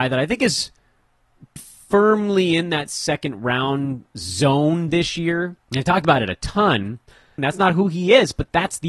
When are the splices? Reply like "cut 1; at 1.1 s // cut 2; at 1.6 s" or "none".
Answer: cut 1; at 1.6 s // cut 2; at 5.6 s // cut 3; at 7.4 s